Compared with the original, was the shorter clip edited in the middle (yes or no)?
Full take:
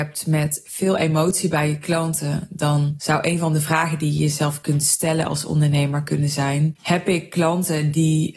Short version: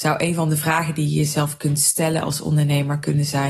no